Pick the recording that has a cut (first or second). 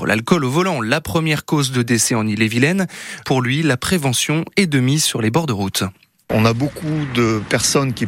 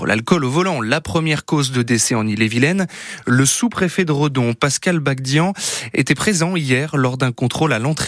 first